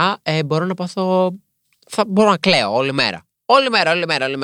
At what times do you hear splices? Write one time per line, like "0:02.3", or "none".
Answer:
none